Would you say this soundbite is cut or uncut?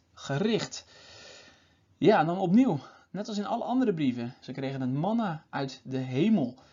cut